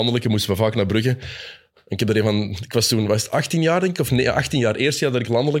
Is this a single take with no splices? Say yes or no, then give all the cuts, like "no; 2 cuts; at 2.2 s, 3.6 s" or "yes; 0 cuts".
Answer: yes; 0 cuts